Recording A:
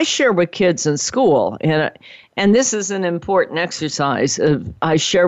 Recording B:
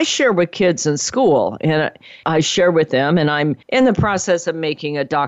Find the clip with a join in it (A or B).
B